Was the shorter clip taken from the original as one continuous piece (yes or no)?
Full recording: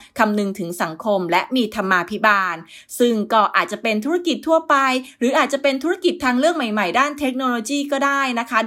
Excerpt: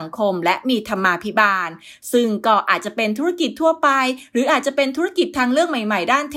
yes